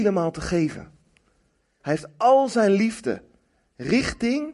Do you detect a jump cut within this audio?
yes; 1 cut; at 1.8 s

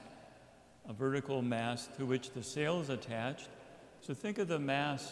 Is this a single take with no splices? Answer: no; 1 cut; at 4.0 s

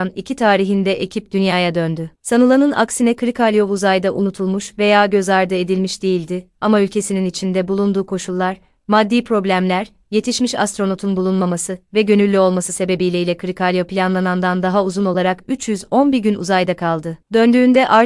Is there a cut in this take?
no; 0 cuts

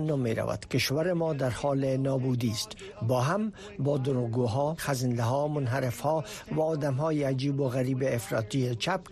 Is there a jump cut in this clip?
yes; 1 cut; at 4.8 s

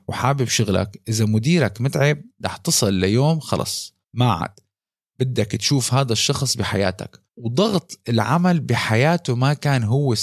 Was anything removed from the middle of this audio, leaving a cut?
yes; 2 cuts; at 4.0 s, 7.3 s

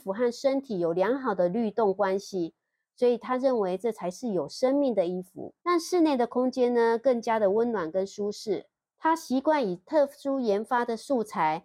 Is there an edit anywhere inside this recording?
yes; 2 cuts; at 5.6 s, 8.9 s

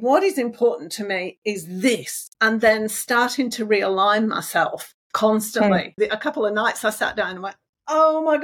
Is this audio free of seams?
no; 2 cuts; at 2.3 s, 6.0 s

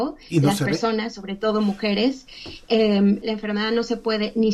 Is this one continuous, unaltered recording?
no; 1 cut; at 3.2 s

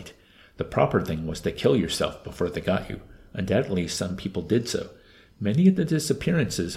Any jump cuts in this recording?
no; 0 cuts

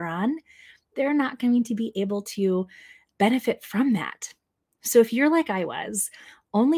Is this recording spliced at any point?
yes; 1 cut; at 4.7 s

